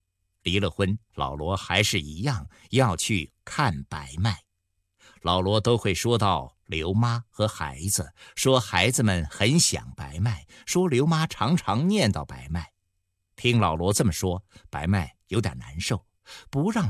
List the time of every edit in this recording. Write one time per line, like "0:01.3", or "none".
0:01.1